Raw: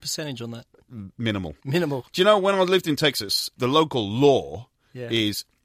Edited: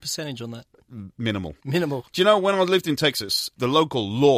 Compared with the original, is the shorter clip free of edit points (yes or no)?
yes